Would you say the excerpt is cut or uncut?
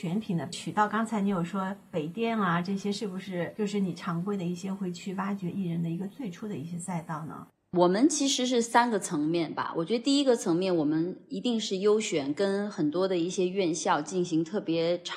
uncut